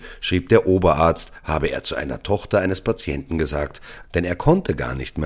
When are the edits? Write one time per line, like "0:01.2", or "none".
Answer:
0:04.0